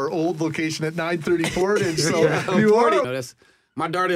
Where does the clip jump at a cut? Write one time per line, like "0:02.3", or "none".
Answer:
0:03.0

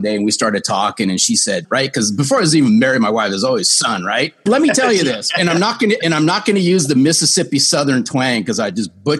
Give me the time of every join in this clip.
0:01.6
0:04.5

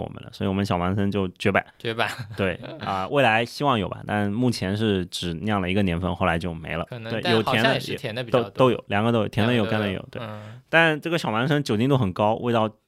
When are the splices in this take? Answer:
0:06.9

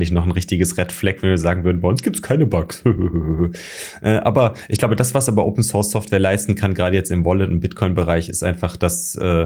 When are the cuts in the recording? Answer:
none

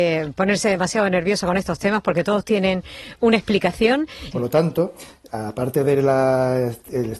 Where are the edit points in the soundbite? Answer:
0:04.3

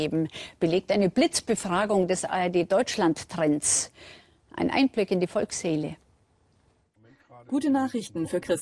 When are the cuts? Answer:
none

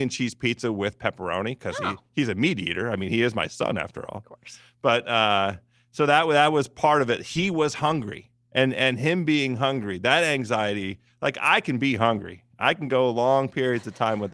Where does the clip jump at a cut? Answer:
none

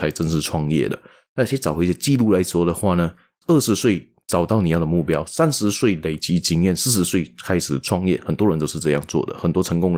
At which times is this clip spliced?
none

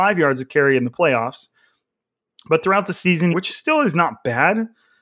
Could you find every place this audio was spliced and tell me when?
0:03.3

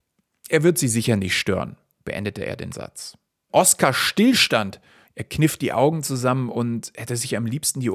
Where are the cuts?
0:03.5
0:05.0

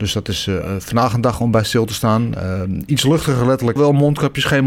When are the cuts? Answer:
0:03.8

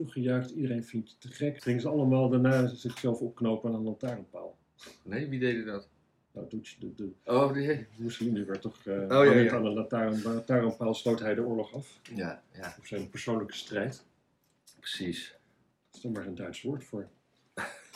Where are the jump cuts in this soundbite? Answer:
0:01.6

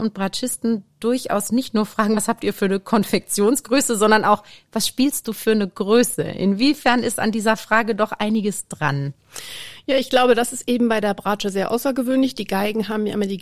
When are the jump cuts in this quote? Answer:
none

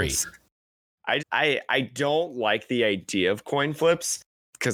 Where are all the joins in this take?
0:01.2

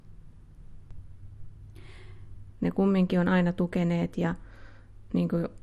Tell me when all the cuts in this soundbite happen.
0:02.5

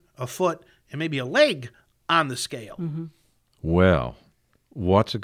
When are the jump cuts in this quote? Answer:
0:03.5

